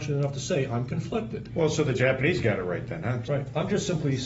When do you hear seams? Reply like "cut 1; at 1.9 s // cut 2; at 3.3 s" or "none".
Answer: cut 1; at 1.5 s // cut 2; at 3.2 s